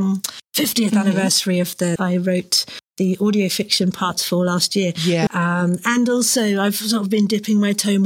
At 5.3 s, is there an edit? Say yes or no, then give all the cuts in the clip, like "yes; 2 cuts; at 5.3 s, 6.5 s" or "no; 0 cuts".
yes; 2 cuts; at 2.0 s, 5.3 s